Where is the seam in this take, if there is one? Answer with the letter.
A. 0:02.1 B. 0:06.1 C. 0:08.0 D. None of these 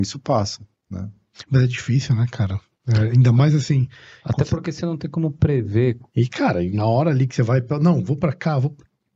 B